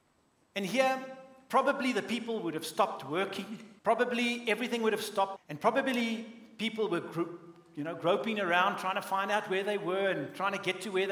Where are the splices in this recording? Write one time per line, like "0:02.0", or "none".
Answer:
0:03.8
0:05.4